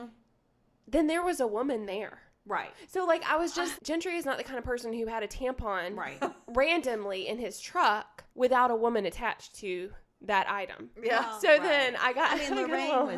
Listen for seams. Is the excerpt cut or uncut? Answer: cut